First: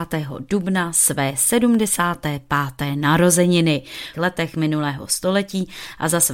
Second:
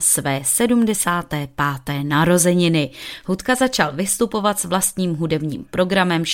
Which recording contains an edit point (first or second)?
first